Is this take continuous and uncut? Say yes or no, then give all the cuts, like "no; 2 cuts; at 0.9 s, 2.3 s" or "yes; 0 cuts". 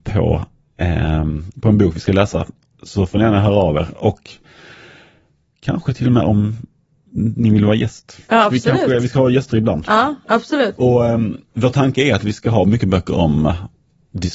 yes; 0 cuts